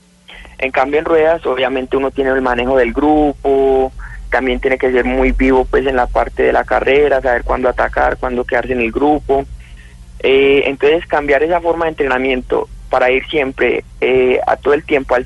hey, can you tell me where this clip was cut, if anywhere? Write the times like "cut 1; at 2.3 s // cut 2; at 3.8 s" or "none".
none